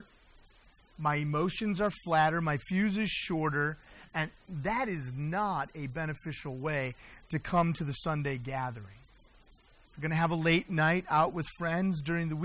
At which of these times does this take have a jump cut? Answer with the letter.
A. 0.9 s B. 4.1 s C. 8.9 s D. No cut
D